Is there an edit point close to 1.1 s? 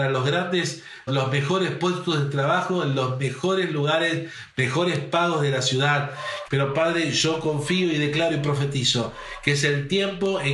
yes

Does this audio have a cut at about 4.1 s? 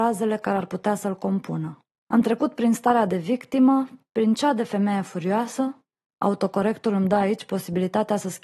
no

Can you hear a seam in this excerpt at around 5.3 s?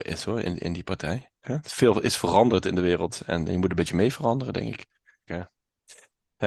yes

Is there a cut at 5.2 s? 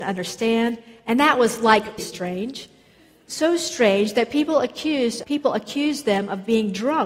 yes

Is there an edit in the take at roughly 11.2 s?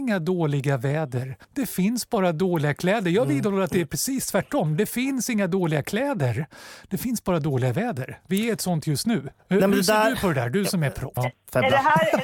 yes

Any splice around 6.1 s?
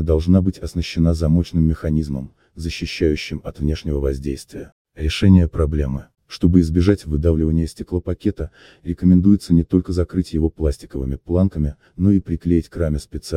yes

